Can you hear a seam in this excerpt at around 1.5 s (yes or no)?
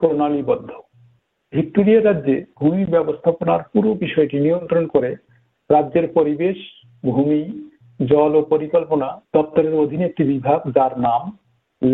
no